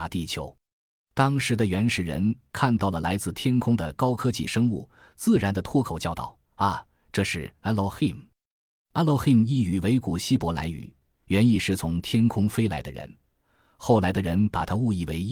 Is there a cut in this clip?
no; 0 cuts

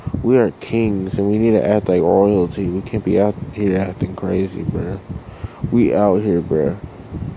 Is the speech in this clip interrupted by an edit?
no; 0 cuts

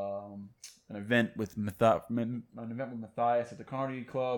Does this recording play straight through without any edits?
yes; 0 cuts

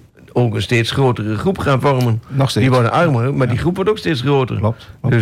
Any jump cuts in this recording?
no; 0 cuts

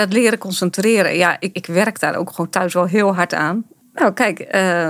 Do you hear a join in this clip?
yes; 2 cuts; at 1.5 s, 3.8 s

